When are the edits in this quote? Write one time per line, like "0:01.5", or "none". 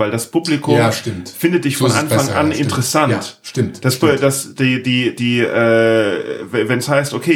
none